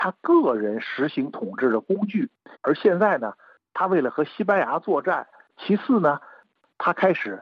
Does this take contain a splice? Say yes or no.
yes